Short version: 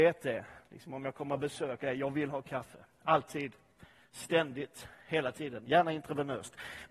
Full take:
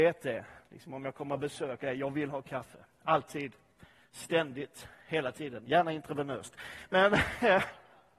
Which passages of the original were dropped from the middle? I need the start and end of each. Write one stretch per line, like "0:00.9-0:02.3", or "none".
none